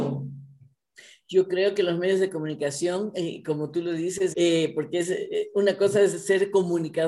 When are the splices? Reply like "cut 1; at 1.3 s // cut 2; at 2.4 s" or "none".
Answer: cut 1; at 4.3 s